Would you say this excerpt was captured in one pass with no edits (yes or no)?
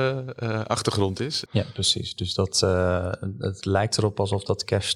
no